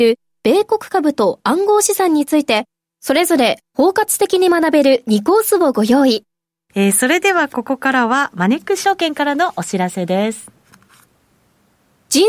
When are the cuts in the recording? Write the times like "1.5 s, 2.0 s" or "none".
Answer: 6.7 s